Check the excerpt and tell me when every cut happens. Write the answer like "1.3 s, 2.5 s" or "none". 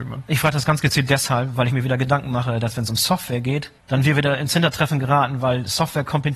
3.8 s